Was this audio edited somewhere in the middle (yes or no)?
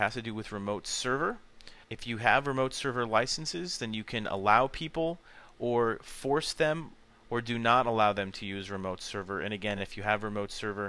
no